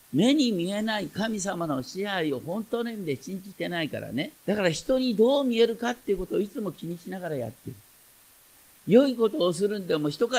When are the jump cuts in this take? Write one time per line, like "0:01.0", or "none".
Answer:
0:04.4